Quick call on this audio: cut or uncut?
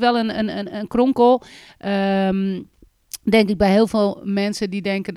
uncut